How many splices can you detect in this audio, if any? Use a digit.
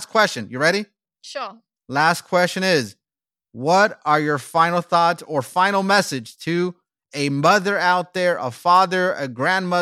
0